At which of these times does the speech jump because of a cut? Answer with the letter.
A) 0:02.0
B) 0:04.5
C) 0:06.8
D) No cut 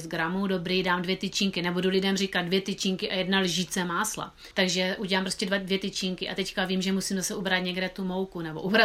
B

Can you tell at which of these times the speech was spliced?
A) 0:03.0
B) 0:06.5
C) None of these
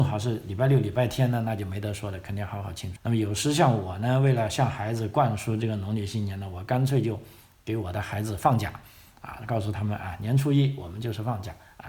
A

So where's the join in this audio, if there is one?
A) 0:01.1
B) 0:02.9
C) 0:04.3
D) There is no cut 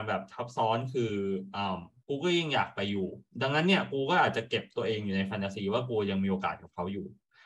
D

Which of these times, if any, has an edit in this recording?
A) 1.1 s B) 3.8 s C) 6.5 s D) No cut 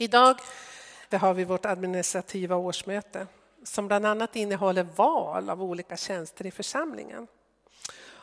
A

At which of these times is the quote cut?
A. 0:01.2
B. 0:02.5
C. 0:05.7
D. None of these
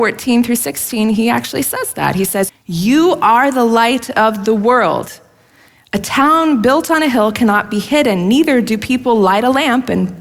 B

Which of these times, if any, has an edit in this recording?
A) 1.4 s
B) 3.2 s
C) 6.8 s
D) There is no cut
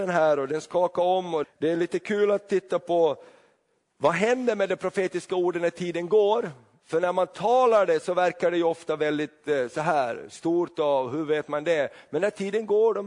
A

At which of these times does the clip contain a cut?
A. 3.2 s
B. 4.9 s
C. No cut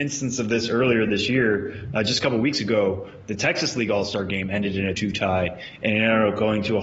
B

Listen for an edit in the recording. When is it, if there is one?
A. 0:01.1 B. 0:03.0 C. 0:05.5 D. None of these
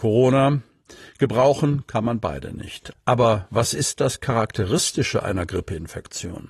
D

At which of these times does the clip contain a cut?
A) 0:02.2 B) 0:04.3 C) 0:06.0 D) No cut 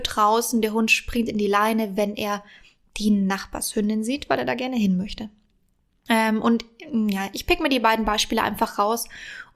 D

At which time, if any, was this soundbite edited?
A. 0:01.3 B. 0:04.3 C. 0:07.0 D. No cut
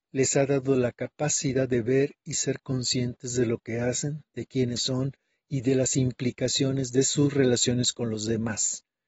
B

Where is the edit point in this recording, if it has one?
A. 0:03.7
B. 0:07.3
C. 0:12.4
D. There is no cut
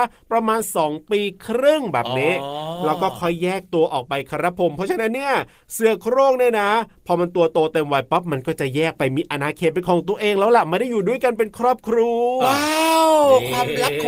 C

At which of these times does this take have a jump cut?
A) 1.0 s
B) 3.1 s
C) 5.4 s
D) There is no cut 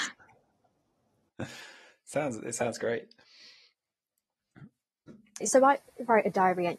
C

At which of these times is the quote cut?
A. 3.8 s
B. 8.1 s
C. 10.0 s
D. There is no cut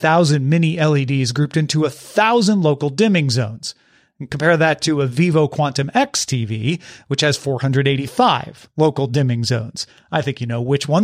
D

